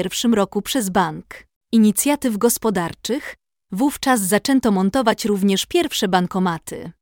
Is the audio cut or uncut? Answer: cut